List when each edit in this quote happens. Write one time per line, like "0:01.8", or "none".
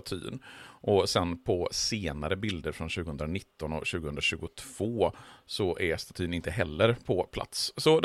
0:05.4